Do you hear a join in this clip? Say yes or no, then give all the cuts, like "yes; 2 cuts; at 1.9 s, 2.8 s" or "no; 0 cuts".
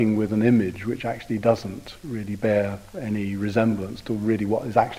no; 0 cuts